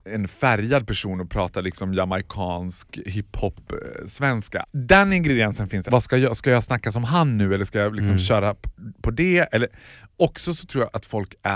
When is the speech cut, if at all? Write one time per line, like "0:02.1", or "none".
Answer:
0:04.6
0:05.9